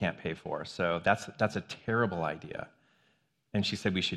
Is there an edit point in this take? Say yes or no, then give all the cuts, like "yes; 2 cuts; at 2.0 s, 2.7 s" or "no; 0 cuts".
no; 0 cuts